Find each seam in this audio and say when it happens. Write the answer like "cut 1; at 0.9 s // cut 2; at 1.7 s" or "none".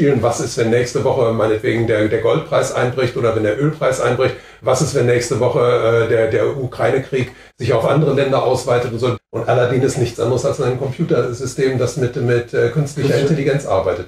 cut 1; at 9.2 s